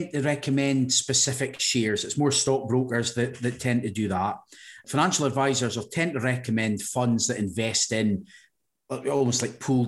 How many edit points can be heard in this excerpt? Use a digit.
0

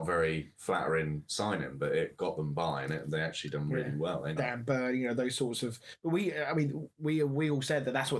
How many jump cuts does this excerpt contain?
1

